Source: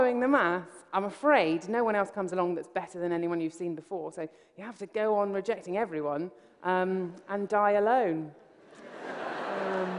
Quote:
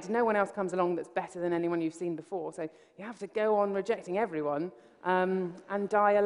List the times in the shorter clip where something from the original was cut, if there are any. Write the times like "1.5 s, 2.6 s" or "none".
none